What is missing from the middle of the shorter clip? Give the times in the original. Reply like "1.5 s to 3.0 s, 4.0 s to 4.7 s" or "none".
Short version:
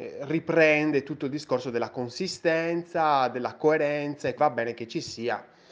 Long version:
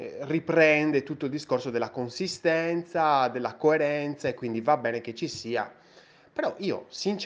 4.4 s to 4.6 s